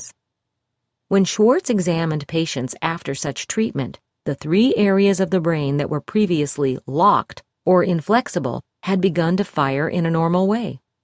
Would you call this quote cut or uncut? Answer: uncut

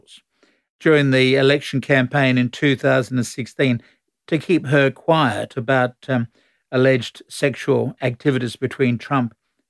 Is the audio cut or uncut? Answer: uncut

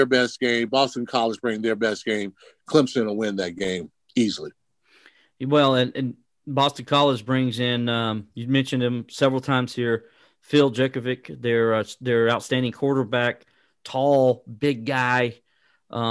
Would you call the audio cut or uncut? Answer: uncut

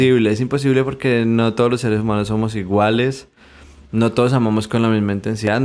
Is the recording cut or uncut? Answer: uncut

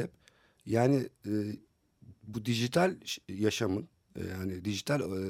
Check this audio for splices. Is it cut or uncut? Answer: cut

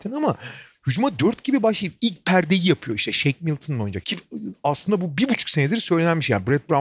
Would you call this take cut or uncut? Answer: cut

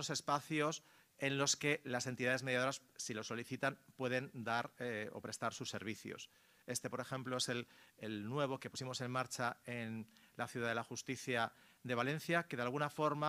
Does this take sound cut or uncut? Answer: uncut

